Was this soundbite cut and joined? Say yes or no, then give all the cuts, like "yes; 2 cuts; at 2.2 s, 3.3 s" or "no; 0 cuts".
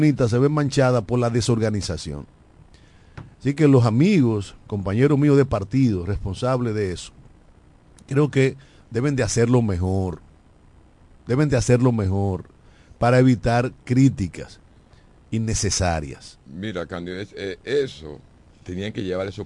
no; 0 cuts